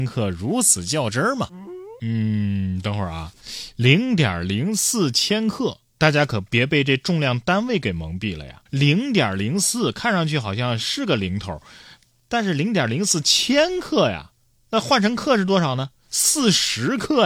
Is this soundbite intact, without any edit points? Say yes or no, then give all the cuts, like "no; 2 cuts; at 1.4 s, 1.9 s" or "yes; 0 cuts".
no; 1 cut; at 8.7 s